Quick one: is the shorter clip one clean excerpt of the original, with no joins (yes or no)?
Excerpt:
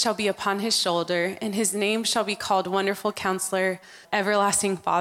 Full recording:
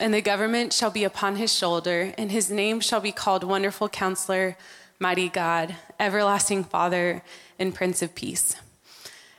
no